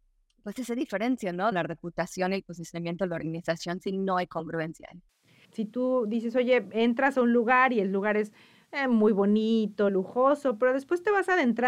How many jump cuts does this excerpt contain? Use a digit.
3